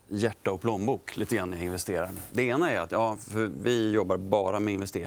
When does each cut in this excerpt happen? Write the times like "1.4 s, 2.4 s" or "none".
none